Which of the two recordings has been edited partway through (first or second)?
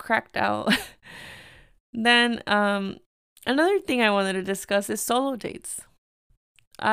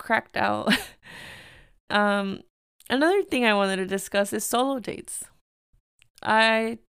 second